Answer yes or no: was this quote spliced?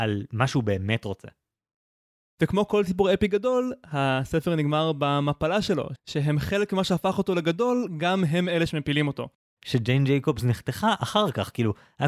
yes